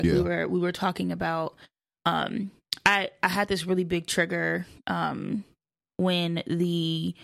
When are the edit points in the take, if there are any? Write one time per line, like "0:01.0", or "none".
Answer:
none